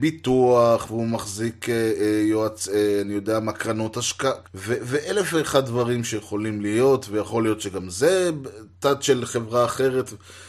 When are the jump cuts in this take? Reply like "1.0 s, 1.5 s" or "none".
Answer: 4.4 s